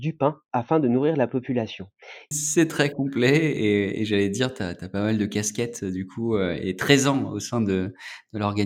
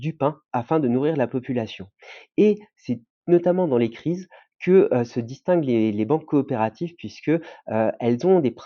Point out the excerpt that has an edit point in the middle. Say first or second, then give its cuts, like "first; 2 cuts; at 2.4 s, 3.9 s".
first; 1 cut; at 2.3 s